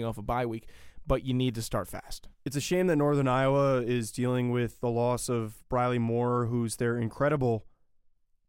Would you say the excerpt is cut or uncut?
cut